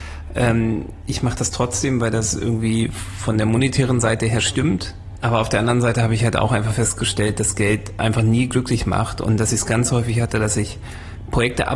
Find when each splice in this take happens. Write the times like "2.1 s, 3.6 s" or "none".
5.2 s